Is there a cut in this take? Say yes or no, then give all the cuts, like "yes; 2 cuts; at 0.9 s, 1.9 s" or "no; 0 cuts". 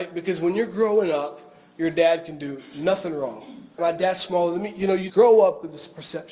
yes; 2 cuts; at 3.8 s, 5.1 s